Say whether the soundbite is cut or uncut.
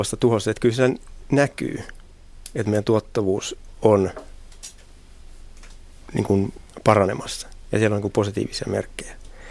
uncut